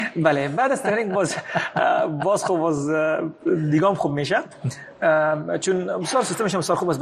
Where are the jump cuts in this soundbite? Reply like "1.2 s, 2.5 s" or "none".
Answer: none